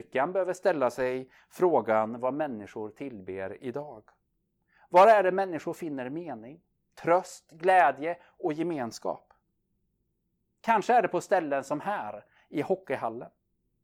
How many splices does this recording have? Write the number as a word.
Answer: zero